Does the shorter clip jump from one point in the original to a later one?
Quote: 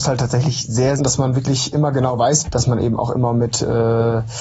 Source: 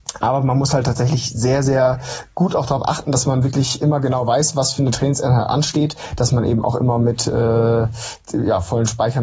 yes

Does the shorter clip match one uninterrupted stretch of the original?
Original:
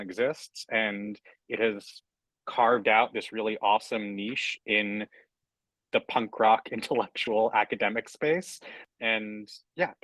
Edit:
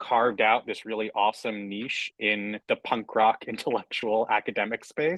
no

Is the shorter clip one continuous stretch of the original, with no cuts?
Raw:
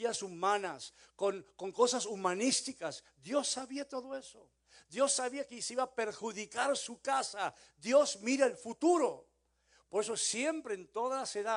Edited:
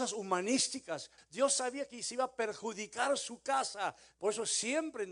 no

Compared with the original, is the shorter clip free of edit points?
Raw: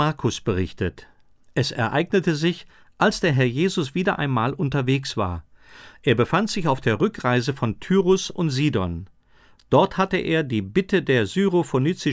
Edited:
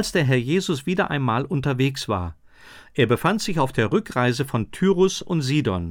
yes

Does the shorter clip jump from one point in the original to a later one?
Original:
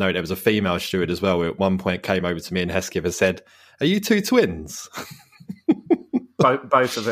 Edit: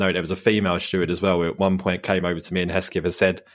no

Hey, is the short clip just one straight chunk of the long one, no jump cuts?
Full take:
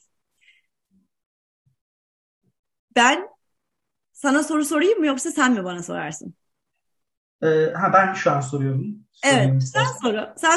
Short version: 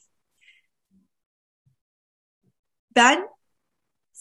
yes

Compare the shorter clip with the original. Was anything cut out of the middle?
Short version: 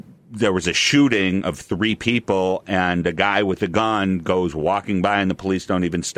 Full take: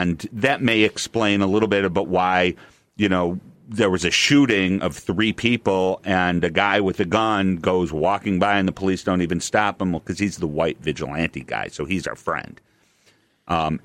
no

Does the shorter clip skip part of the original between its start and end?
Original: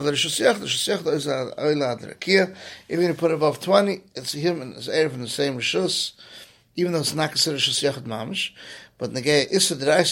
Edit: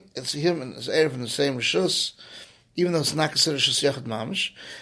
no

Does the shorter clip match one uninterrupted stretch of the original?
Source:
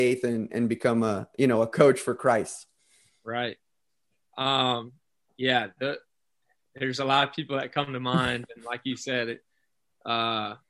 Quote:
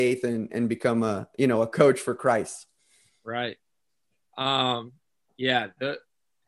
yes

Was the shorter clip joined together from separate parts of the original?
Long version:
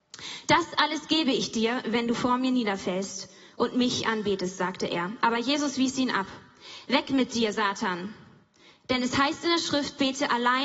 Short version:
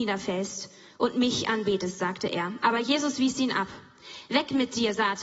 no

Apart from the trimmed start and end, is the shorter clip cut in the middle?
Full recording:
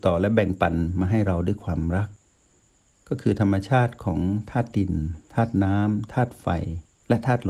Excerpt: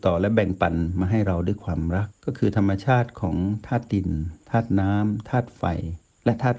yes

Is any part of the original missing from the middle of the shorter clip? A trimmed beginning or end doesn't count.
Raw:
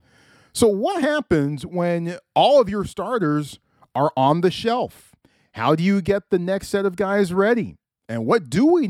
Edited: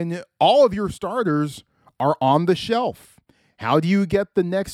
no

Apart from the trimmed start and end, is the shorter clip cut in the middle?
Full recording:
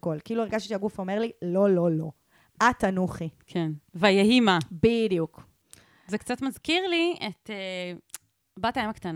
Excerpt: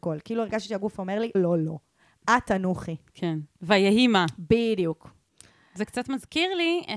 yes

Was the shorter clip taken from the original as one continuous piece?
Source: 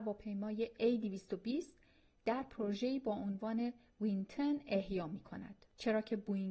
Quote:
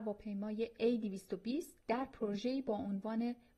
no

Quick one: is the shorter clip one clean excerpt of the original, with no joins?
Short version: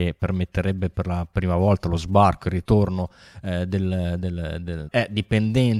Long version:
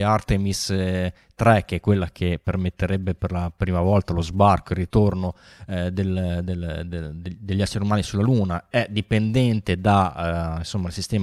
no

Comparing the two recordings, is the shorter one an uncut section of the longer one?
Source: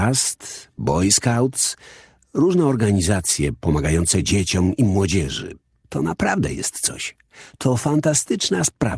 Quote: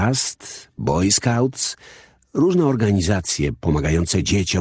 yes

